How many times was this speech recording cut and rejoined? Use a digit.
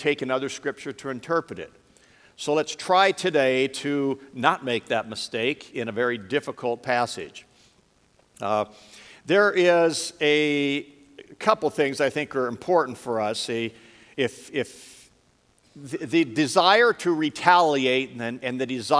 0